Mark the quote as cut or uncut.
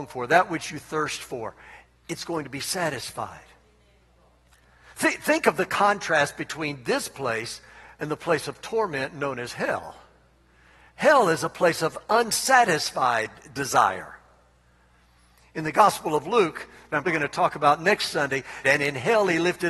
cut